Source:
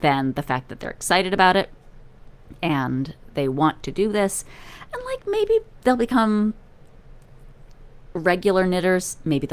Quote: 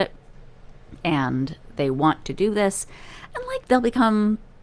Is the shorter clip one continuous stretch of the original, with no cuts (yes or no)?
no